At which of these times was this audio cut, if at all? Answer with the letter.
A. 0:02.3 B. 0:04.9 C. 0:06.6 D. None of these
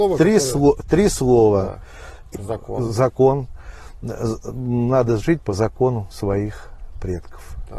A